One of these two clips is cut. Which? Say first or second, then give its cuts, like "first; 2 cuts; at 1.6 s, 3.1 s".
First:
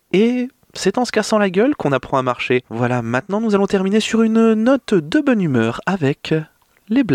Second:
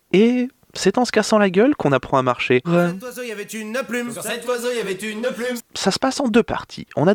second; 2 cuts; at 2.6 s, 5.6 s